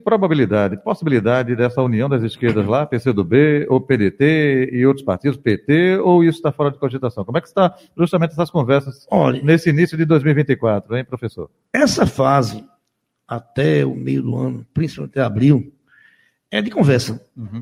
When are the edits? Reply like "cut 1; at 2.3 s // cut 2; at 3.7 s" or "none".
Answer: none